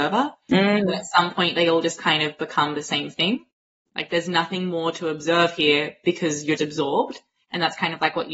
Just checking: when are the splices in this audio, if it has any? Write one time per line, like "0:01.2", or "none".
0:03.9
0:06.6